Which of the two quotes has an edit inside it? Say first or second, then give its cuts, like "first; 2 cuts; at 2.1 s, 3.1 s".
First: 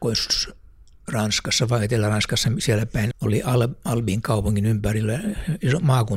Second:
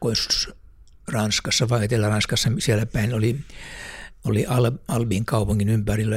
first; 1 cut; at 3.1 s